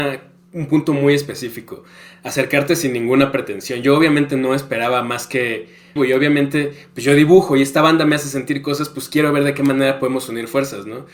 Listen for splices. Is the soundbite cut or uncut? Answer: cut